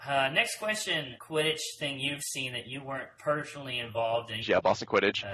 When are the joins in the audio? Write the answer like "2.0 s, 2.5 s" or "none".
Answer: 1.2 s, 4.4 s